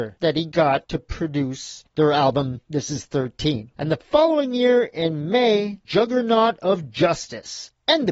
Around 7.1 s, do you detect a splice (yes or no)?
no